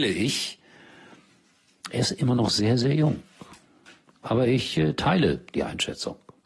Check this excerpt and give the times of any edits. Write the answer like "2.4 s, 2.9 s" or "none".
none